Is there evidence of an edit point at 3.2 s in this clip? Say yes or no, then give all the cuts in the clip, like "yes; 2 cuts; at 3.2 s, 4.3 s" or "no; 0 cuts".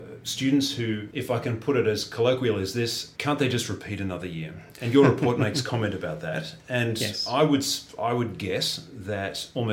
yes; 2 cuts; at 1.1 s, 3.2 s